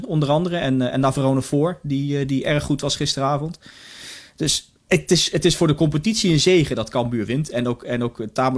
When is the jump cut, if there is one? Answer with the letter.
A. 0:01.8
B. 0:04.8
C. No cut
B